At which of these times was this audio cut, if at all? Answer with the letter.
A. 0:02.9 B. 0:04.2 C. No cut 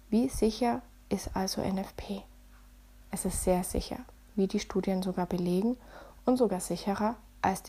C